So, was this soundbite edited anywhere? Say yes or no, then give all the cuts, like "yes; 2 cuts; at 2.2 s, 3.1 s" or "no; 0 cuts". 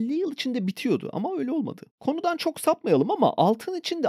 yes; 1 cut; at 1.9 s